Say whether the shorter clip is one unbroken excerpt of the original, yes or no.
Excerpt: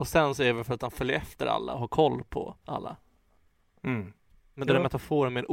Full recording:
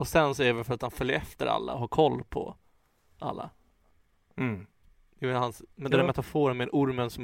no